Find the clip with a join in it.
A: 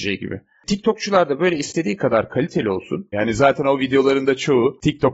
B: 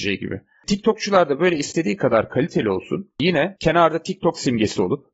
A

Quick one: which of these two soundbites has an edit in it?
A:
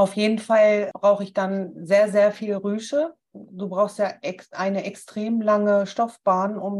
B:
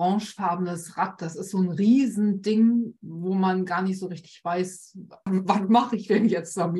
B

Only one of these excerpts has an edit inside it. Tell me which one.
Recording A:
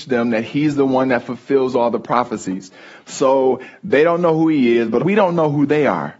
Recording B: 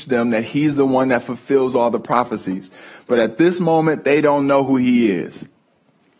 A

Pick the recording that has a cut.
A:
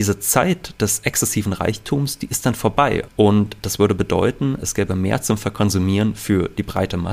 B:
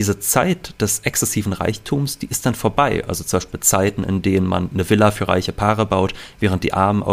A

